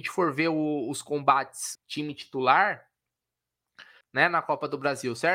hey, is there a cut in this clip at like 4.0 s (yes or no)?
yes